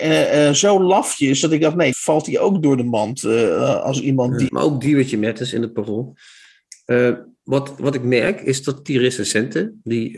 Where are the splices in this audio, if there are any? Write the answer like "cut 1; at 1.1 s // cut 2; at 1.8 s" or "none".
cut 1; at 1.9 s // cut 2; at 4.5 s

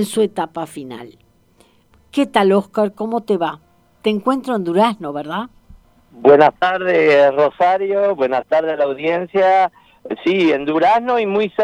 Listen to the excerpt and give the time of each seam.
none

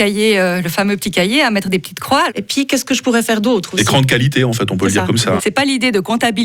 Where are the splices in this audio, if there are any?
cut 1; at 2.3 s // cut 2; at 5.4 s

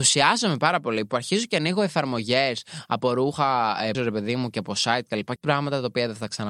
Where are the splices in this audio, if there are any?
cut 1; at 3.9 s // cut 2; at 5.4 s

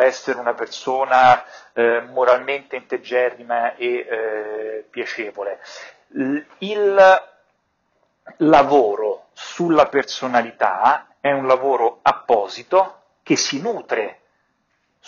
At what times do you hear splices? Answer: cut 1; at 11.1 s

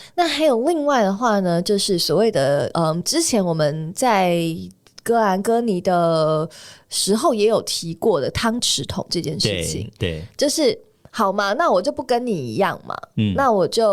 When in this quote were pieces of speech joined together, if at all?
none

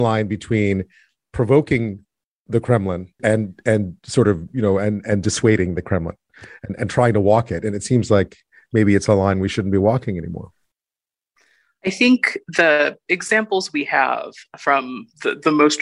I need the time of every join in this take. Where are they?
cut 1; at 3.2 s

